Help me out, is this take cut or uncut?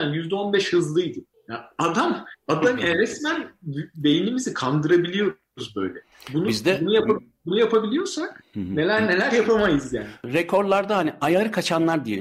uncut